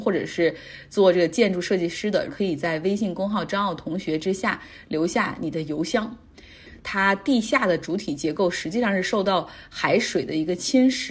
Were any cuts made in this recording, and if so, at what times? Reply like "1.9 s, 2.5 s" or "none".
2.3 s, 6.8 s